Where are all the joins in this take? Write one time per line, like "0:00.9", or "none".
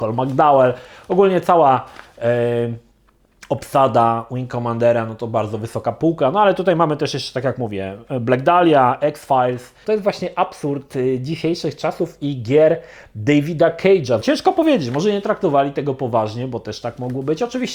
0:09.8
0:14.2